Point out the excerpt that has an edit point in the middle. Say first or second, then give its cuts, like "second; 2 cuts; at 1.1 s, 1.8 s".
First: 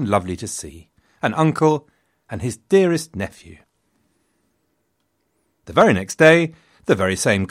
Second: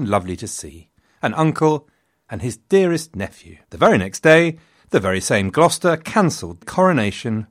second; 2 cuts; at 3.6 s, 6.6 s